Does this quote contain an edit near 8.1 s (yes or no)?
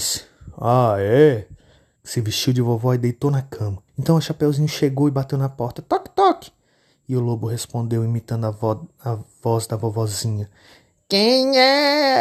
no